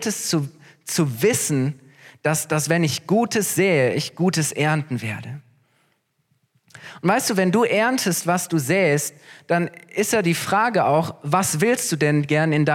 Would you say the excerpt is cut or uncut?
uncut